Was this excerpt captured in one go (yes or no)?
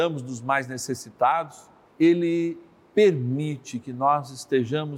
no